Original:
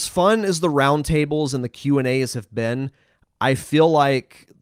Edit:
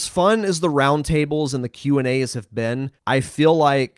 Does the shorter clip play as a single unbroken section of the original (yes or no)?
no